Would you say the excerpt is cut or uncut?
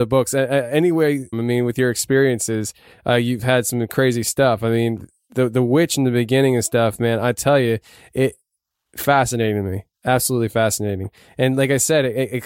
cut